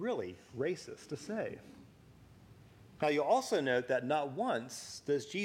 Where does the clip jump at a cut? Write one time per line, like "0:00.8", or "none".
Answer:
0:03.0